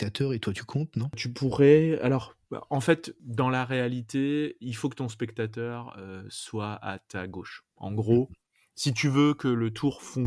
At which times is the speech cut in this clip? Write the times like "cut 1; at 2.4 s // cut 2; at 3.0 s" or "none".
cut 1; at 7.7 s